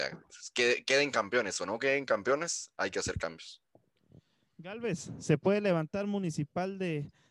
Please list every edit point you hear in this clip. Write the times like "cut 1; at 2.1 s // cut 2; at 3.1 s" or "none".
none